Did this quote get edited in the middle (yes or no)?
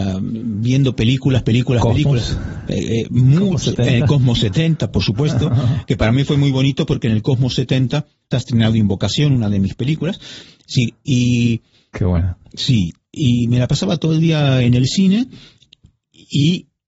yes